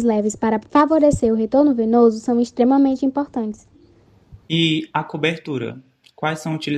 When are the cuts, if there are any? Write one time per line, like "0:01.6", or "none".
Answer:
0:04.4